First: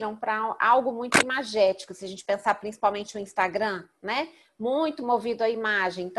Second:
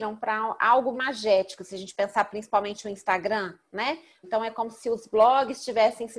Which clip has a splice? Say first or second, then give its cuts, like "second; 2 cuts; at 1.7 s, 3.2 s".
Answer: second; 2 cuts; at 0.9 s, 4.2 s